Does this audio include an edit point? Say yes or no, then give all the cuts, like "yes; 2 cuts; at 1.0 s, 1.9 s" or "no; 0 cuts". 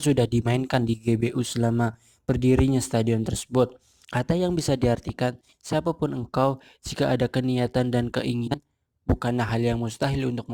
yes; 1 cut; at 4.0 s